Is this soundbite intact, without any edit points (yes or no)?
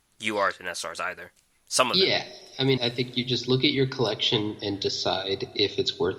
no